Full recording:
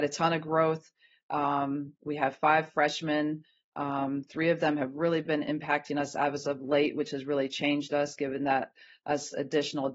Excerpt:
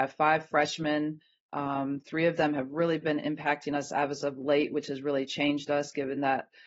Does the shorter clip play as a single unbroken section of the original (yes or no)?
yes